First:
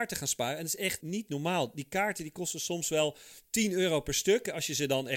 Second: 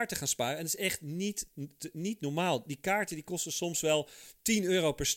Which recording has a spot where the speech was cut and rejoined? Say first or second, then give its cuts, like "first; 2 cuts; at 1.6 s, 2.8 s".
first; 1 cut; at 1.0 s